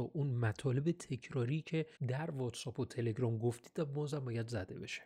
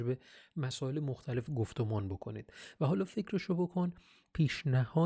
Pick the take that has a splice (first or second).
first